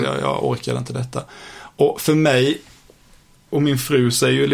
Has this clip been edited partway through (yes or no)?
no